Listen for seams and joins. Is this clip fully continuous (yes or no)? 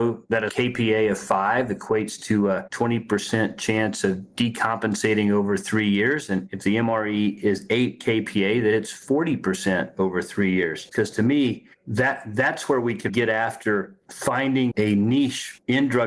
no